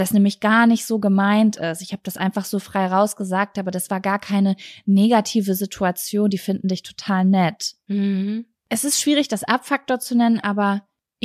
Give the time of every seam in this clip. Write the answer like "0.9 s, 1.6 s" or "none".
none